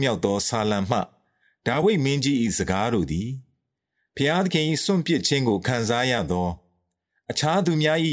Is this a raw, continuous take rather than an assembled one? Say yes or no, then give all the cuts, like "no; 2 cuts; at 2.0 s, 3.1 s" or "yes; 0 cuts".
yes; 0 cuts